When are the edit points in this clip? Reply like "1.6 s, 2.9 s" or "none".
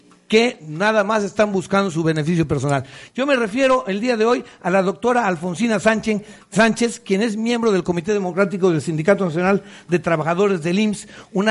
none

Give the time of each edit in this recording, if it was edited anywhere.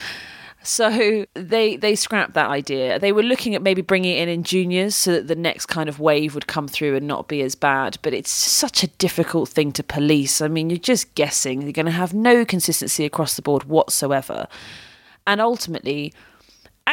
8.5 s

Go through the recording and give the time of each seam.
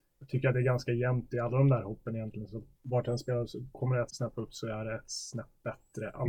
2.7 s, 4.1 s

